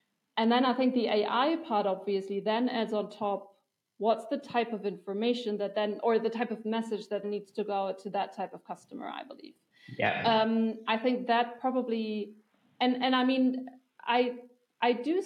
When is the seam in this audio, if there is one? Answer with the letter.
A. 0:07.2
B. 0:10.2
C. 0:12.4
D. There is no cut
A